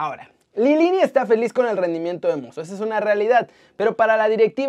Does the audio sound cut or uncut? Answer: uncut